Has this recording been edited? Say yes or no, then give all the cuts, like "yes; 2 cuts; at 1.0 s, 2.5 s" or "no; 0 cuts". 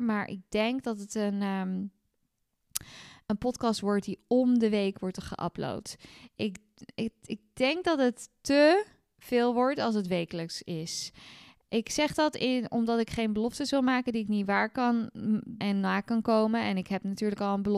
yes; 1 cut; at 15.6 s